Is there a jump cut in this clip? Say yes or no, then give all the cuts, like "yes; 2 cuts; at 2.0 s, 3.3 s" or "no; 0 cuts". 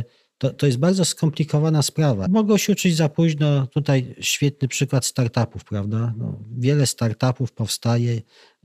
yes; 1 cut; at 2.3 s